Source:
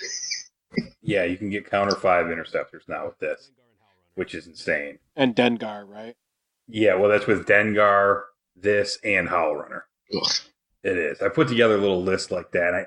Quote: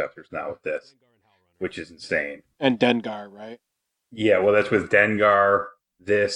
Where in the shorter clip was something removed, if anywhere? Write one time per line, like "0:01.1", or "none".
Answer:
none

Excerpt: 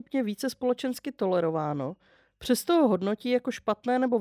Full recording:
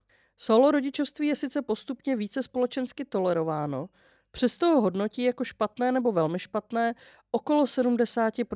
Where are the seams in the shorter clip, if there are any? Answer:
none

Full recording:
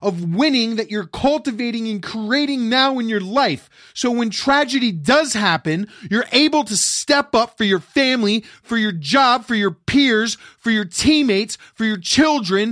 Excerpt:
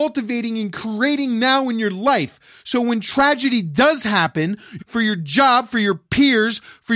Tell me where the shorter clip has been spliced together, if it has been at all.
0:04.8

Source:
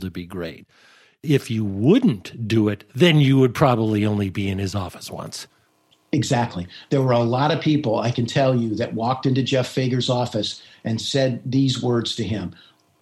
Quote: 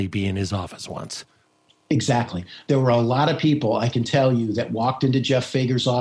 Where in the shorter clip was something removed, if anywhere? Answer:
none

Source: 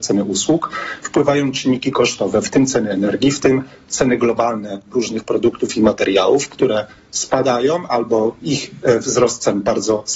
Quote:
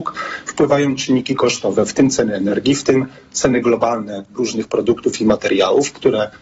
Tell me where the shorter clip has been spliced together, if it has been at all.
none

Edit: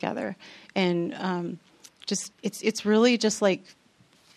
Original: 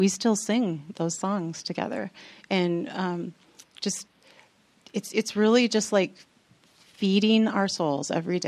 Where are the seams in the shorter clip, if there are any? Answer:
0:02.4

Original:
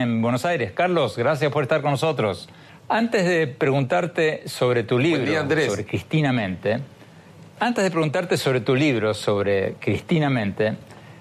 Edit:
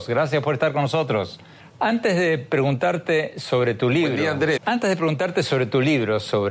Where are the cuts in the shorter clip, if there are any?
0:04.6

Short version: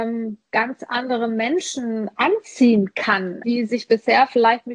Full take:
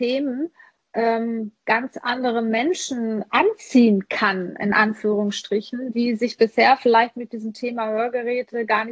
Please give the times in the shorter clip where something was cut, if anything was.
0:03.4

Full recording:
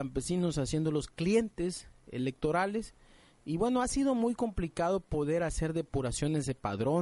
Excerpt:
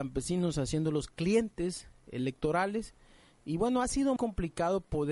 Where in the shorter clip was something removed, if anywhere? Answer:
0:04.2

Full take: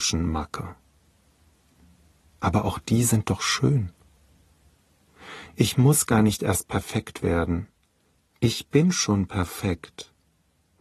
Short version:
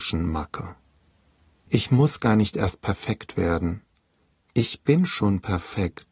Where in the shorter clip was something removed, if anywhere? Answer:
0:01.7

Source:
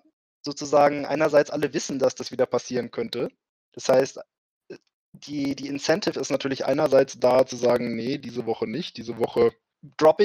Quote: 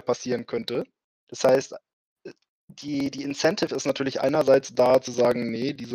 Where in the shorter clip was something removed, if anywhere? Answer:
none

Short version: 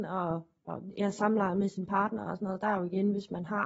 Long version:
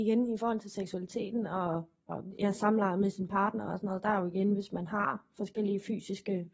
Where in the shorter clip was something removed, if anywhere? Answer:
none

